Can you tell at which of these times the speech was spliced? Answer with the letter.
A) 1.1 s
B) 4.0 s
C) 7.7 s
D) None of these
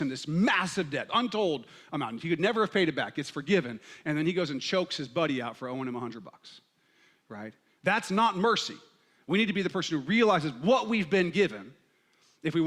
A